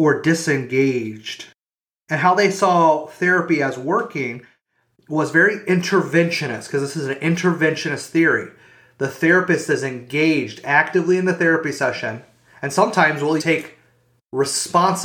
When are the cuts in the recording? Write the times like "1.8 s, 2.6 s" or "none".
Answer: 13.4 s